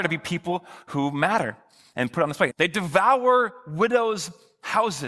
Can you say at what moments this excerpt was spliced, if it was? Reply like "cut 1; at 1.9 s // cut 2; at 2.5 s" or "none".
cut 1; at 2.5 s